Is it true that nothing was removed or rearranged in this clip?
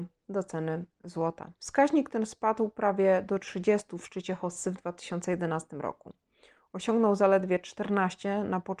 no; 1 cut; at 1.6 s

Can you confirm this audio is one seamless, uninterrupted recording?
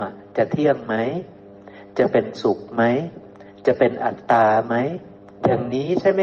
yes; 0 cuts

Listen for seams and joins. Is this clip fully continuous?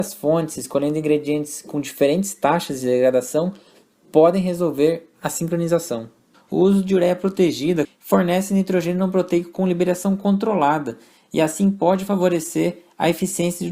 no; 2 cuts; at 6.3 s, 7.8 s

